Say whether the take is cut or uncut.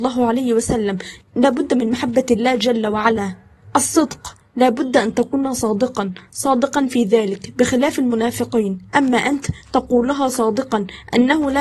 uncut